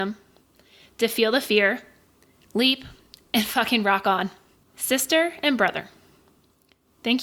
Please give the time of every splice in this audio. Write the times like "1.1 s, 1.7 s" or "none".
4.6 s